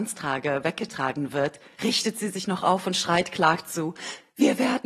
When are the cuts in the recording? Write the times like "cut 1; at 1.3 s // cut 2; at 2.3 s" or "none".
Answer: none

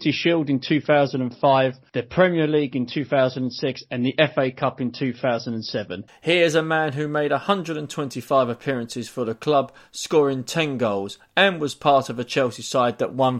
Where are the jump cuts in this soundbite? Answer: cut 1; at 6.1 s

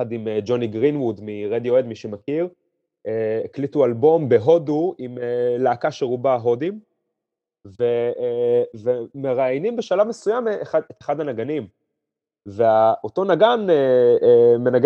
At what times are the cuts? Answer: none

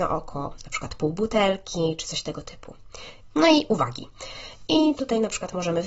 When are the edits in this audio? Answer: cut 1; at 3.3 s

